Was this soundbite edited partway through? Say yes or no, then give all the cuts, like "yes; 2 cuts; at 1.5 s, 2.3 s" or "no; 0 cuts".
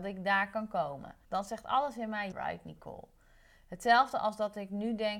yes; 2 cuts; at 1.2 s, 2.3 s